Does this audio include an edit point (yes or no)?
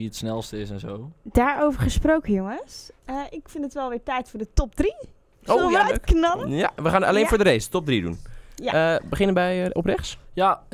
no